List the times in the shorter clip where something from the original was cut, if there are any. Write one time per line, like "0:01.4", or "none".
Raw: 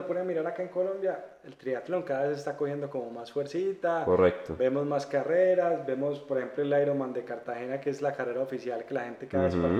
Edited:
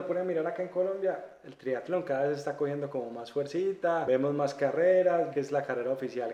0:04.0
0:05.3